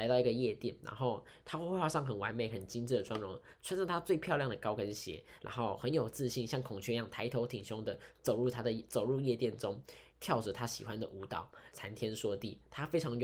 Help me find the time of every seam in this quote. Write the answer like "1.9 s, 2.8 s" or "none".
10.1 s, 11.7 s